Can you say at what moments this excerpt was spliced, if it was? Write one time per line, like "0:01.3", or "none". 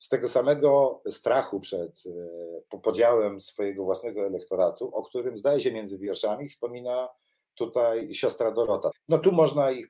0:08.9